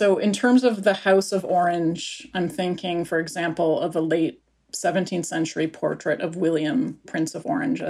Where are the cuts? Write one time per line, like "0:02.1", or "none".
none

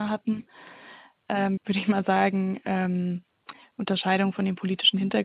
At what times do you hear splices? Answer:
0:01.6

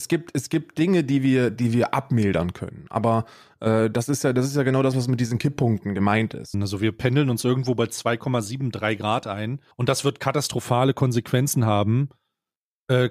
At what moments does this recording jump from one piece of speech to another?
0:06.5
0:09.7

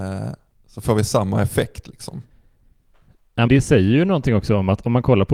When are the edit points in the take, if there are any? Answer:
0:03.5

